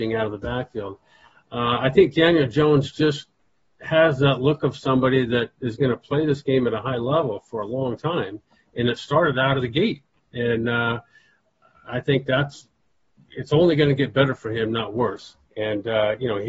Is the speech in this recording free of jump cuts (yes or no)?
yes